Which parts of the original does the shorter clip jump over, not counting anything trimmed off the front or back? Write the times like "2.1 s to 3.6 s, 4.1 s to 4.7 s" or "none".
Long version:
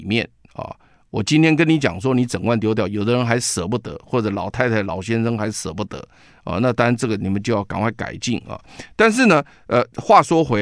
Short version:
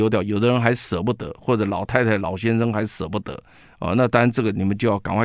none